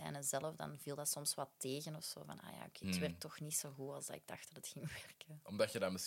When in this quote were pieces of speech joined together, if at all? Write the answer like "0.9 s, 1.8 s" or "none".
2.8 s